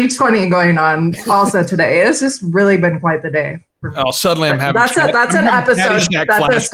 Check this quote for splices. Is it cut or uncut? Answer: uncut